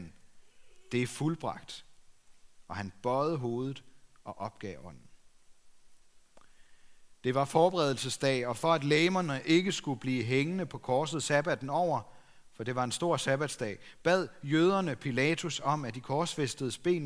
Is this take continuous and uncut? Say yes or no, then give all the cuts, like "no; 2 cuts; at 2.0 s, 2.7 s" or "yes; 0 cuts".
yes; 0 cuts